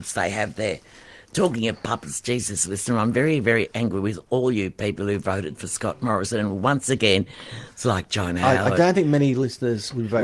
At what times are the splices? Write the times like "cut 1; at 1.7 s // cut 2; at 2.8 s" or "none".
none